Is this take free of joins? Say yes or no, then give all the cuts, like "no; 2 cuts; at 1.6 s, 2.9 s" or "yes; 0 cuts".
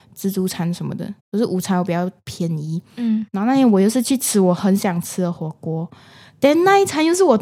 no; 1 cut; at 1.2 s